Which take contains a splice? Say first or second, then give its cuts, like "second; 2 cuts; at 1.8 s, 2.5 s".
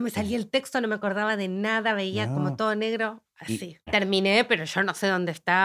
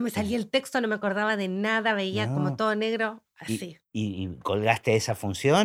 first; 1 cut; at 3.9 s